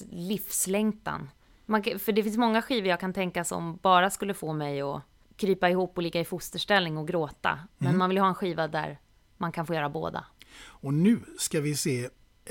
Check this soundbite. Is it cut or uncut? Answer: cut